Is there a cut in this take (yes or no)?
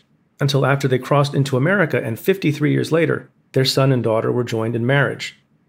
no